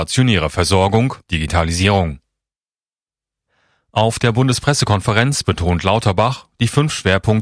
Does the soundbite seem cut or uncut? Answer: cut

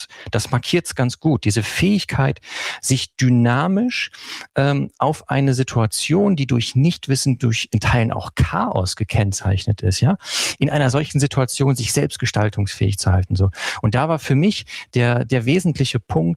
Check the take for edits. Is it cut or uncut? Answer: uncut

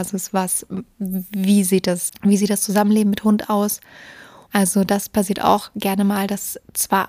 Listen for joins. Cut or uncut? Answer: cut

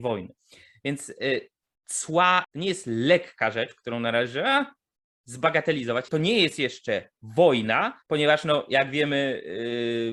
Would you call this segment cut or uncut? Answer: cut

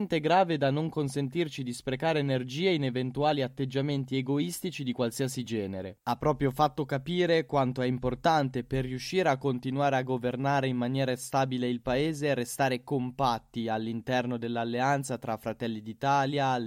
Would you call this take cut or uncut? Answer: cut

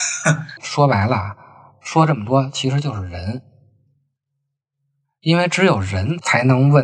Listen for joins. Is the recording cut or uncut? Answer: uncut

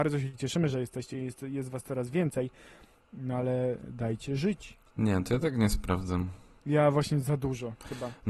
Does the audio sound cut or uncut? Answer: uncut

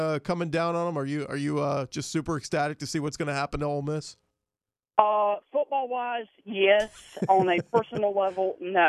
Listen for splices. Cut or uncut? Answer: uncut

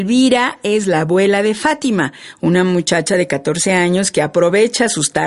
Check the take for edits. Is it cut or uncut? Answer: uncut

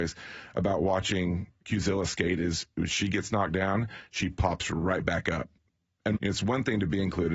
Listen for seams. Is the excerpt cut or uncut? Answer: cut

